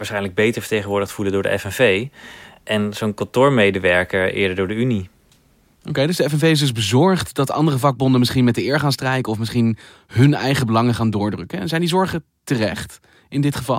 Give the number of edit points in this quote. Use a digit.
0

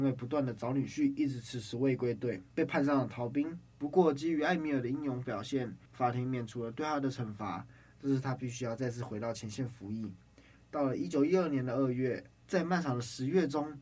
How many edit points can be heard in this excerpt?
2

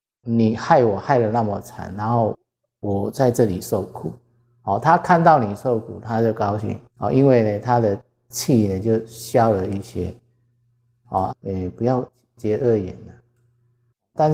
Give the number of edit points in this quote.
2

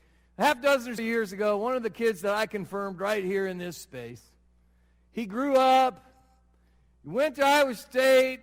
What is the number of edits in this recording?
1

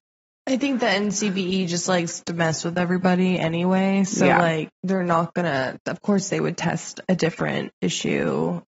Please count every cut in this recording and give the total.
0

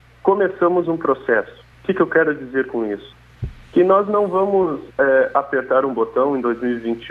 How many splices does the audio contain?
1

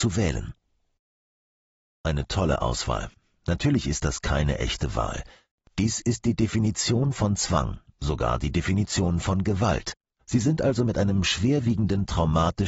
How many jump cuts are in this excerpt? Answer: 1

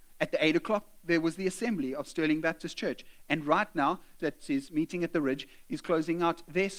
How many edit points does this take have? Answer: 1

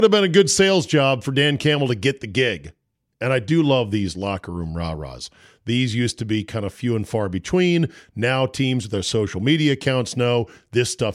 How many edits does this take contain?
1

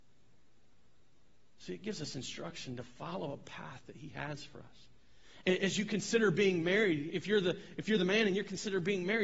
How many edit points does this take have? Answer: 2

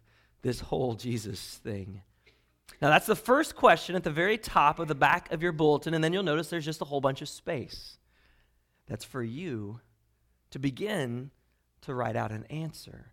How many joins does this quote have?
0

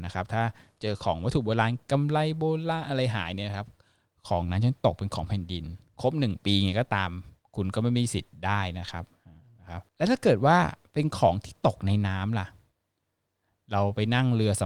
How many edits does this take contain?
1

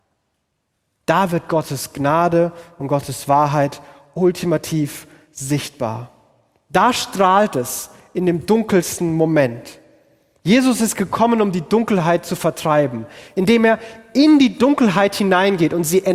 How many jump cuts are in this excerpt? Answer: 0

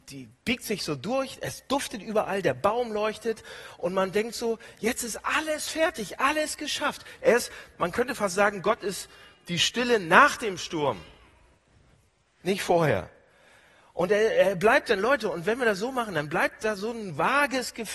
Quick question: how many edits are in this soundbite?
1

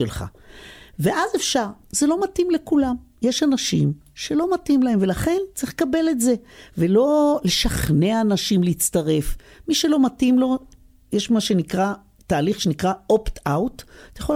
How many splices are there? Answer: 1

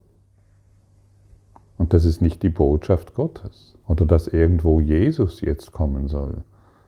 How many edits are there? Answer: 1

